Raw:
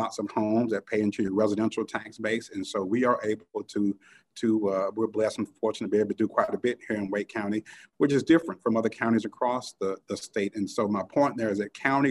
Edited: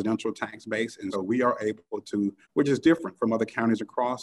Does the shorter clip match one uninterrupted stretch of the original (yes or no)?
no